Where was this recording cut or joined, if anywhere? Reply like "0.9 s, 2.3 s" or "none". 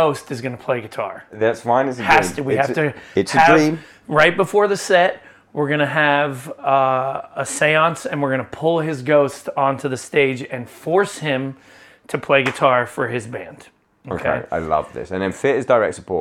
none